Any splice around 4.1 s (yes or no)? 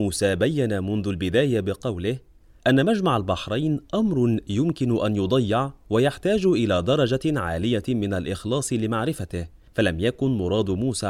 no